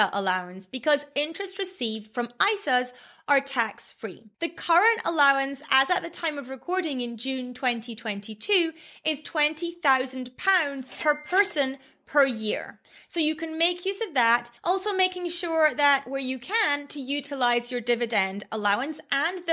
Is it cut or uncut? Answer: cut